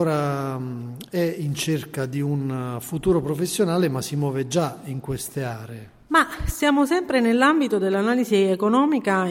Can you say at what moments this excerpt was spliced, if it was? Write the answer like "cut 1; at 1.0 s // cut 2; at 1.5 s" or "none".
none